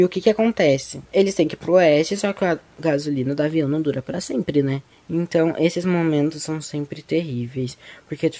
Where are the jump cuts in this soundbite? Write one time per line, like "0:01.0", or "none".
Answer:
0:01.1
0:04.9